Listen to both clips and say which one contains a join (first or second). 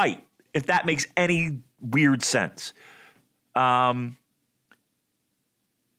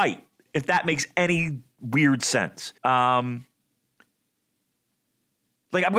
second